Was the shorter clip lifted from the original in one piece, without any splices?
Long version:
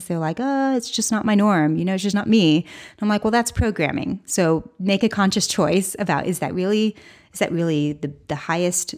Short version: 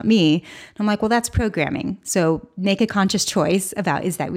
yes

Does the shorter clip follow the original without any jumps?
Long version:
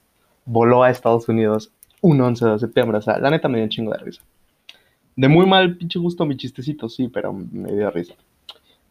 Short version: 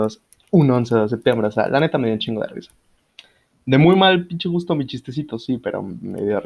yes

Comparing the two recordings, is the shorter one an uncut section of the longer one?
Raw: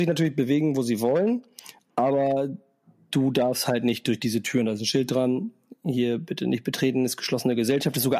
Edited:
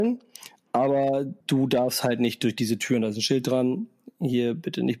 no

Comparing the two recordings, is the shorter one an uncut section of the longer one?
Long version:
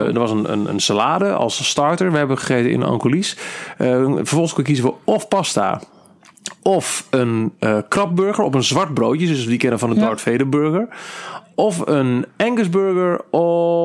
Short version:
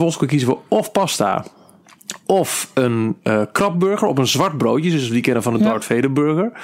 yes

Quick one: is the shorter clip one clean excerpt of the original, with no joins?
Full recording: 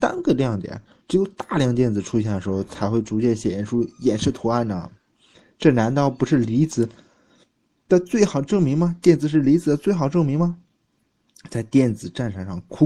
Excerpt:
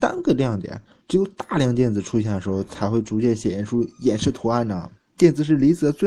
no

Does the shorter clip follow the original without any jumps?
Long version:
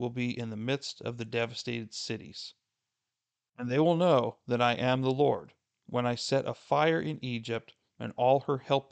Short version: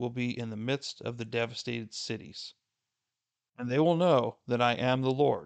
yes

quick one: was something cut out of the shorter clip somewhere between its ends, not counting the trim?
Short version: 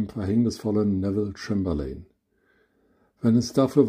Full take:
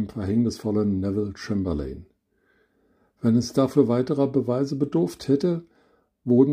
no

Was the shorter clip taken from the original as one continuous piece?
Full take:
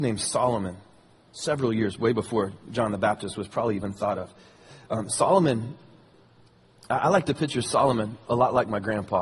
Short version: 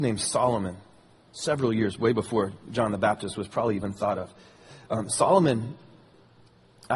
yes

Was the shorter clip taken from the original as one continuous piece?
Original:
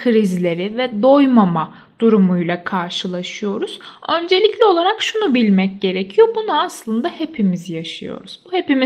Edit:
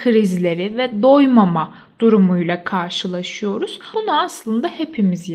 no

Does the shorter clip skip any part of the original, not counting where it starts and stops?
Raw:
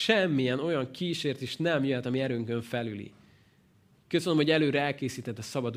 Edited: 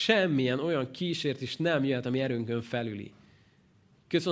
no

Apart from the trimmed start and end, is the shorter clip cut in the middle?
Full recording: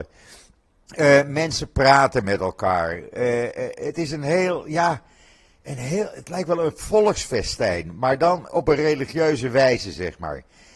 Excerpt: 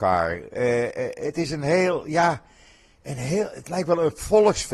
no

